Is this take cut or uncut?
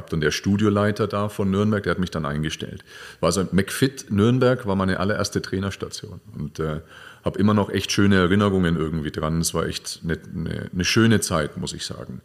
uncut